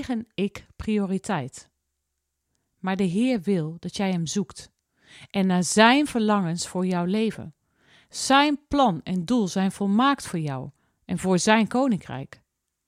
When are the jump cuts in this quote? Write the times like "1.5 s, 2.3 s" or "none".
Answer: none